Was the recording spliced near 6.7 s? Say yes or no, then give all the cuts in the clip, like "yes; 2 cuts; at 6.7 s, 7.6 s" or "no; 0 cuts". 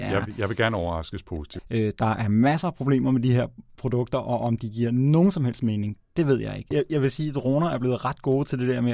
yes; 2 cuts; at 1.6 s, 6.7 s